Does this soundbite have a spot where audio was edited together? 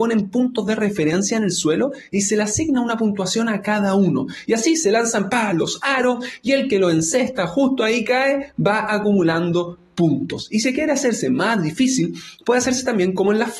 no; 0 cuts

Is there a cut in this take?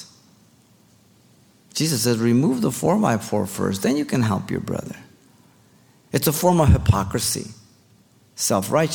no; 0 cuts

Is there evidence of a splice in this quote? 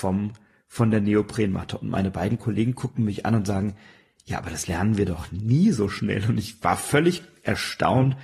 no; 0 cuts

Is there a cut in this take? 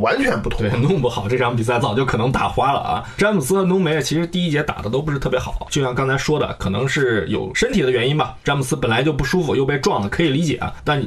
yes; 1 cut; at 1.8 s

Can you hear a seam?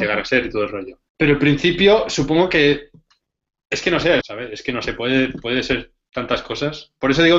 yes; 2 cuts; at 1.1 s, 4.2 s

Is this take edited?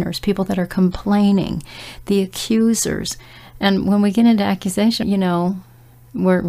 yes; 1 cut; at 5.0 s

